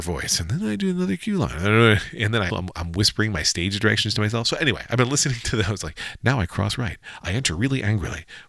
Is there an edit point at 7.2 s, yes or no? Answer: no